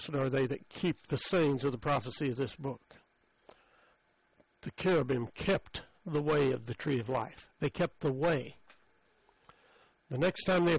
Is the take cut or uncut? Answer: uncut